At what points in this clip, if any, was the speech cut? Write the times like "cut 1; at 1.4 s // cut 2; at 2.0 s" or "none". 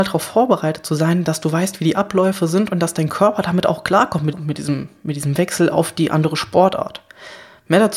cut 1; at 4.3 s